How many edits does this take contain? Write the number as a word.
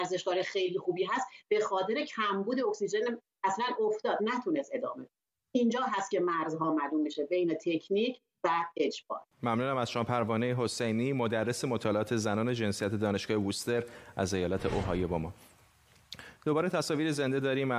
one